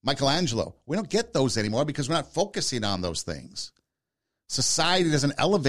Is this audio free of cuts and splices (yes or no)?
yes